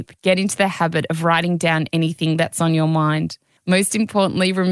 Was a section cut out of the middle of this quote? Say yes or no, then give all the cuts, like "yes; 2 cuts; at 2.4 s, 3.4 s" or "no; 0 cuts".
yes; 1 cut; at 3.6 s